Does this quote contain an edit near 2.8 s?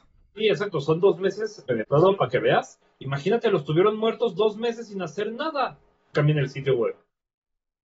yes; 3 cuts; at 1.7 s, 2.8 s, 6.1 s

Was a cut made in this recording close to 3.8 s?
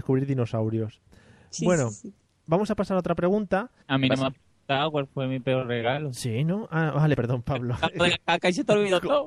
yes; 2 cuts; at 3.8 s, 7.1 s

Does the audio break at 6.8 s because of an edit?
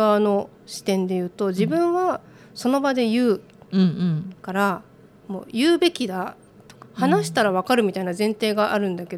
yes; 2 cuts; at 4.4 s, 6.8 s

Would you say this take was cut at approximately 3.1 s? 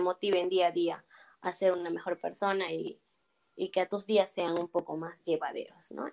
no; 0 cuts

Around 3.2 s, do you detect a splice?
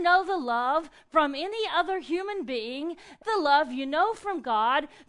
yes; 1 cut; at 3.2 s

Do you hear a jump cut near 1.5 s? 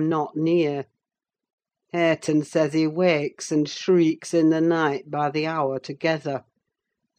no; 0 cuts

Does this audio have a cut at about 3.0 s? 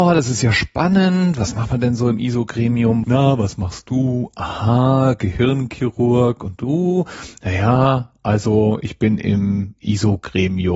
yes; 1 cut; at 3.0 s

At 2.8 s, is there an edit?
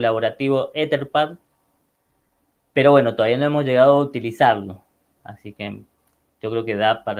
no; 1 cut; at 5.2 s

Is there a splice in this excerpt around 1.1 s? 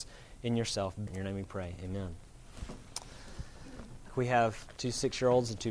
yes; 2 cuts; at 1.1 s, 4.1 s

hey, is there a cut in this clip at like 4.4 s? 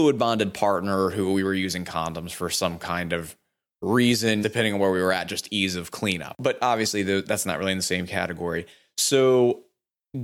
yes; 1 cut; at 4.4 s

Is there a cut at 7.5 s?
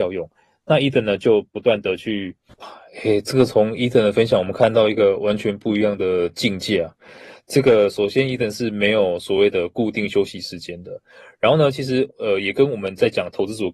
no; 1 cut; at 2.5 s

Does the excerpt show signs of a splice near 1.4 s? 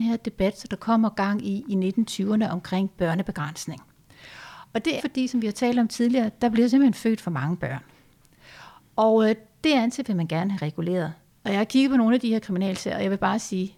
no; 2 cuts; at 5.0 s, 11.3 s

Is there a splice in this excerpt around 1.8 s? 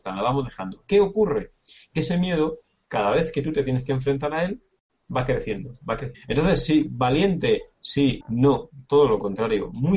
no; 2 cuts; at 6.1 s, 8.2 s

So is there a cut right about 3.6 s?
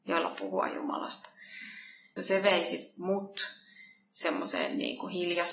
no; 1 cut; at 2.2 s

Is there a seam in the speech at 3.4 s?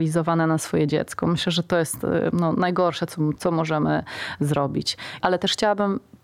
yes; 2 cuts; at 3.4 s, 5.2 s

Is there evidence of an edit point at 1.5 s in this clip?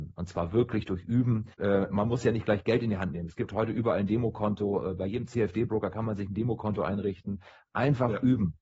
yes; 1 cut; at 1.5 s

